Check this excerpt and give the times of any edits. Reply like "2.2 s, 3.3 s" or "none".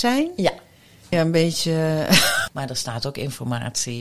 1.1 s, 2.5 s